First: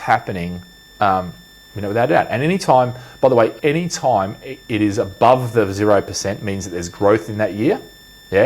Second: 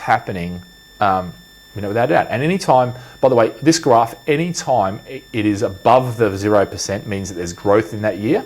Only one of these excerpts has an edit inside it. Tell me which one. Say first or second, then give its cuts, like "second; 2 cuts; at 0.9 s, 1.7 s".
first; 1 cut; at 3.6 s